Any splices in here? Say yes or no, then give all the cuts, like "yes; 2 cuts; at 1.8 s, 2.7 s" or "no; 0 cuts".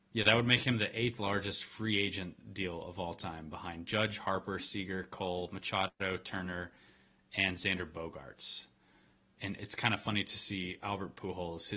no; 0 cuts